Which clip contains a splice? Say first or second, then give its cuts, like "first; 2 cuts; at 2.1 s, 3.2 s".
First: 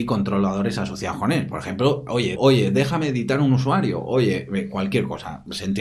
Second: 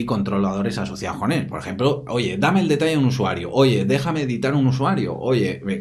first; 1 cut; at 2.4 s